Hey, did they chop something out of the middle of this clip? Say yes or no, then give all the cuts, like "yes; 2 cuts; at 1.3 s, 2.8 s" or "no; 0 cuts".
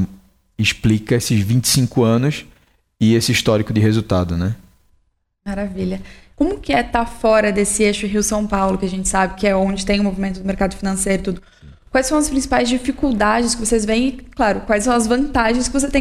yes; 1 cut; at 6.3 s